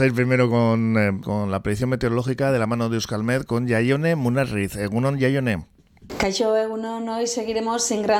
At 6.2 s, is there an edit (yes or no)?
no